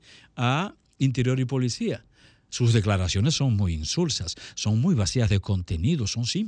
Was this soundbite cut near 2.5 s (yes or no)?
yes